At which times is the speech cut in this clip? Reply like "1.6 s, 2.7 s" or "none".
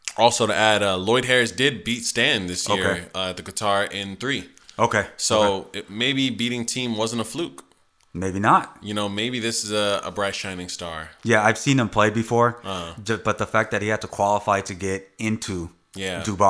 none